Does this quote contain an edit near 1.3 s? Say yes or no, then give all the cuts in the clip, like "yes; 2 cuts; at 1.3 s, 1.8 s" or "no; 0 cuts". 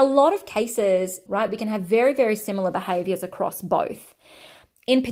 yes; 1 cut; at 1.3 s